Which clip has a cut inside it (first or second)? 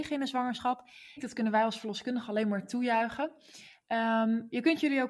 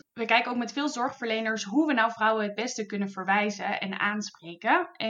first